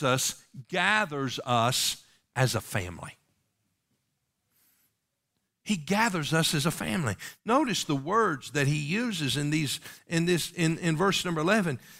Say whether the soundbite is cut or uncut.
uncut